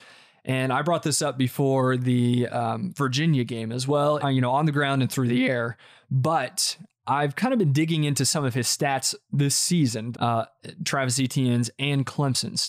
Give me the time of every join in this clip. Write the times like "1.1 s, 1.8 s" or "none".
4.2 s, 10.1 s